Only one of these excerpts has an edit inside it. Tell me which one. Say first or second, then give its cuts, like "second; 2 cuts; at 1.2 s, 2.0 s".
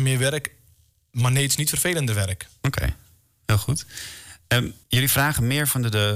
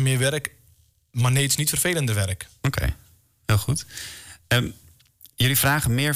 first; 1 cut; at 4.8 s